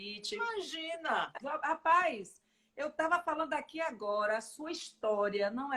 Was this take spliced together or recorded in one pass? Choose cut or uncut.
cut